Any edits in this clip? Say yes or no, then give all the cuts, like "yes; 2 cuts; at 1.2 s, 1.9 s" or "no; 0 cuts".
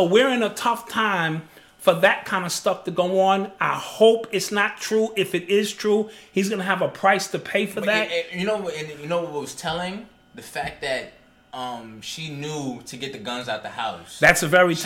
no; 0 cuts